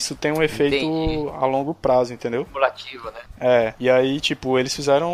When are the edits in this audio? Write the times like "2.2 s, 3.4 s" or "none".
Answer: none